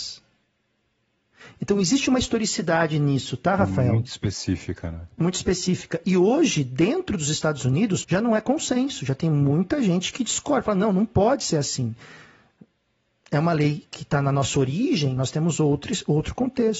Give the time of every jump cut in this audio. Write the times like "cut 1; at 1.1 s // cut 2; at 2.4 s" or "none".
cut 1; at 8.0 s // cut 2; at 15.2 s